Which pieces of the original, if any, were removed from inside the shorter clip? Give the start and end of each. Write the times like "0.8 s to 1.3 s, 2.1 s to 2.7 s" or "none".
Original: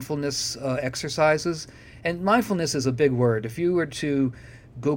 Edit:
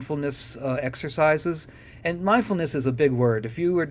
none